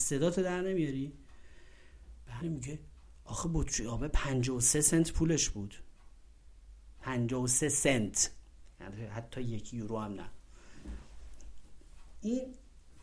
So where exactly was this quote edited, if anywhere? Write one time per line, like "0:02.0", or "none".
0:02.4